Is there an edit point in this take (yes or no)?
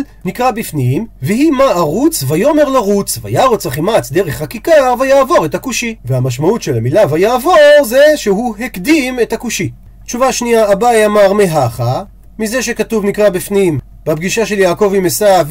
no